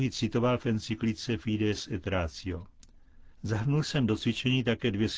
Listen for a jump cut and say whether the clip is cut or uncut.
cut